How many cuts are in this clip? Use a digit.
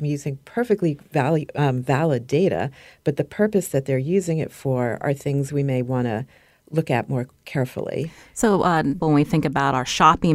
1